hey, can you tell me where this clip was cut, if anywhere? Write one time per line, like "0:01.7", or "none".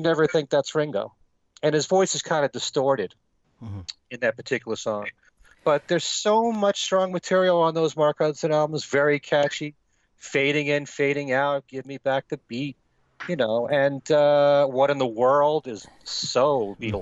none